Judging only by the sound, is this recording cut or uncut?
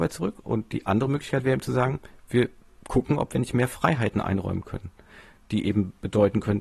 uncut